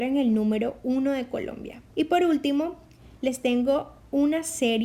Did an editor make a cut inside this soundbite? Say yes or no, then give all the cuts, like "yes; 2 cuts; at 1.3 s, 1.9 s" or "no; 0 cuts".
yes; 1 cut; at 1.9 s